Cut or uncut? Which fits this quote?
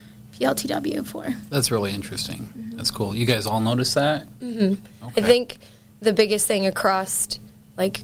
uncut